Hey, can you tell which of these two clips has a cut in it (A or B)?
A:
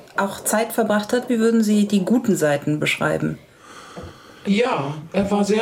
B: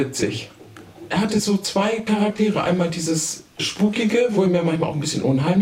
A